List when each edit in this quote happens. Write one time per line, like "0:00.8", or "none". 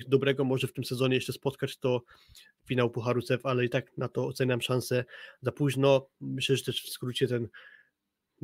none

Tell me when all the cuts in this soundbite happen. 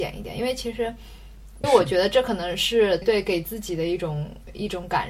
0:01.6
0:03.0

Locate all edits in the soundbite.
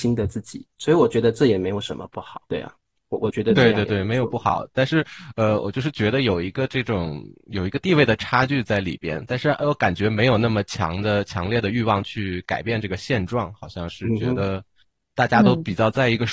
0:02.5

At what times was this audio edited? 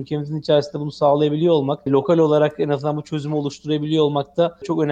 0:01.9

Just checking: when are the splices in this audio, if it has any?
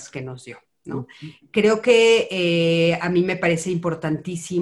0:01.4

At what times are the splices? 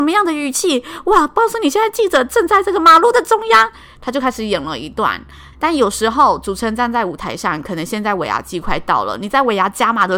0:05.5

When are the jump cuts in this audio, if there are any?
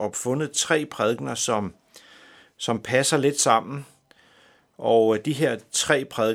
none

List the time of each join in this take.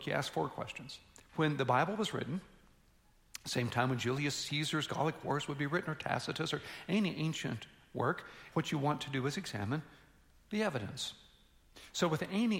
0:01.3
0:08.5

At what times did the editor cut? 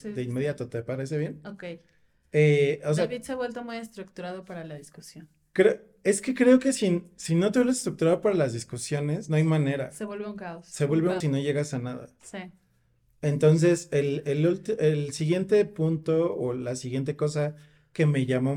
0:11.2

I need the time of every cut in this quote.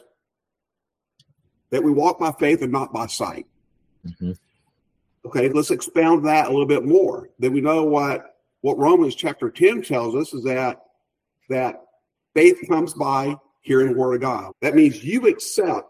0:05.5
0:14.5

